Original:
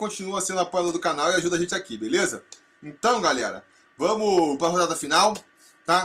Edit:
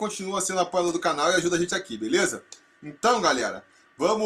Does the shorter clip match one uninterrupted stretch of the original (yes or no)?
yes